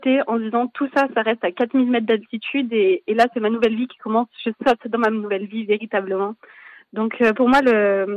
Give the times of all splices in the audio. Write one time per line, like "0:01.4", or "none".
none

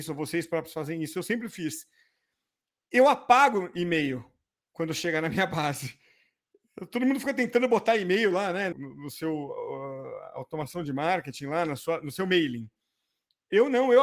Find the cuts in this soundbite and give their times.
0:08.7

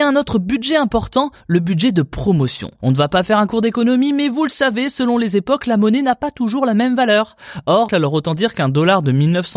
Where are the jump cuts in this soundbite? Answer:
0:02.8
0:07.9

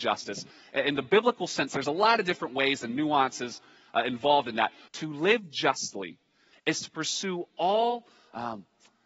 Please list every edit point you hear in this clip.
0:04.9
0:06.5

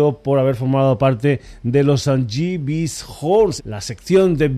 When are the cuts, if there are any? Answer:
0:03.6

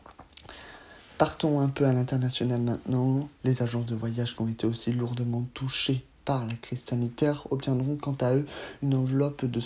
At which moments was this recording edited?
0:03.4

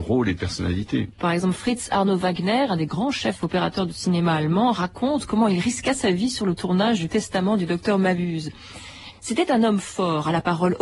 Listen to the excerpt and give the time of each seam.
0:01.1
0:09.1

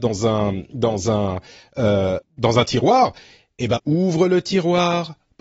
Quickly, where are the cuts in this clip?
0:02.2
0:03.8

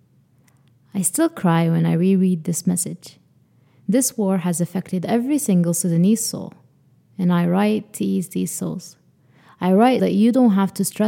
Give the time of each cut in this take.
0:10.0

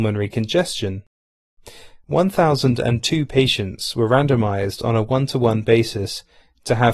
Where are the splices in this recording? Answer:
0:02.0

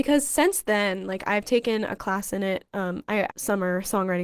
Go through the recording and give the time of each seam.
0:03.3

